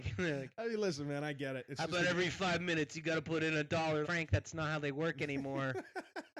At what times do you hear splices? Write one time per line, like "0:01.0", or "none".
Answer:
0:04.0